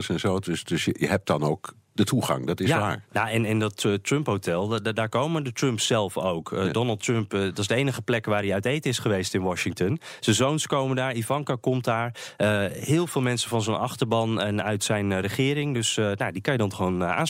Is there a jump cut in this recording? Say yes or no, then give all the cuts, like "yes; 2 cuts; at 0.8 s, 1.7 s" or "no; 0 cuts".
no; 0 cuts